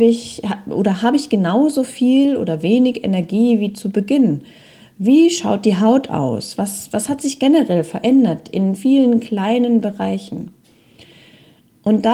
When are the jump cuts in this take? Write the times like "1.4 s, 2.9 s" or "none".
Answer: none